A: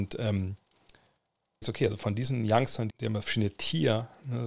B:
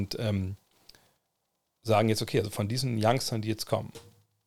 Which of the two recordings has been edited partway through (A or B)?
A